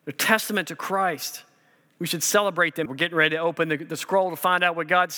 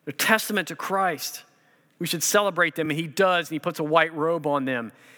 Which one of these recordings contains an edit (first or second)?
first